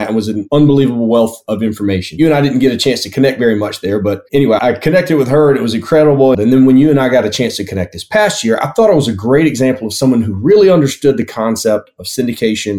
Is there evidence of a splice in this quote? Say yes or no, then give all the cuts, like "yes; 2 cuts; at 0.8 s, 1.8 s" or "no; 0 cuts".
yes; 1 cut; at 6.3 s